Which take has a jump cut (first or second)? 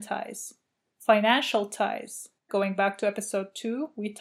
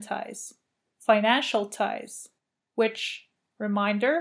first